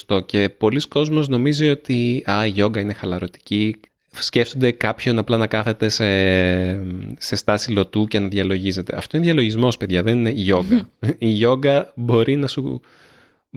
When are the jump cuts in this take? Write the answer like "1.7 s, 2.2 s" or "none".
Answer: none

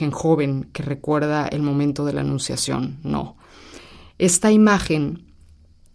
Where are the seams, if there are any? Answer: none

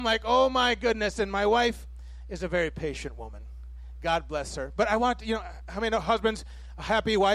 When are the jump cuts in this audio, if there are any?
none

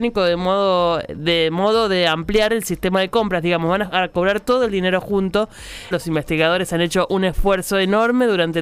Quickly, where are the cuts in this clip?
5.9 s

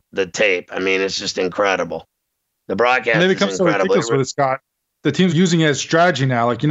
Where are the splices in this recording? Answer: 5.3 s

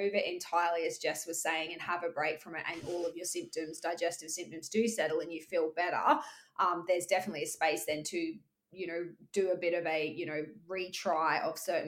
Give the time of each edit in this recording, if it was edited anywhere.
none

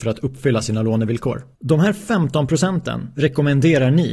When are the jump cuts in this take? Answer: 1.5 s

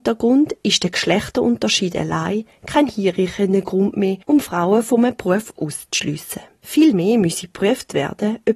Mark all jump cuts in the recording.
none

